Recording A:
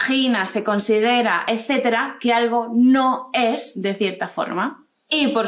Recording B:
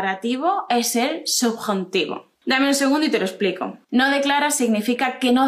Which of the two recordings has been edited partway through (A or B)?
B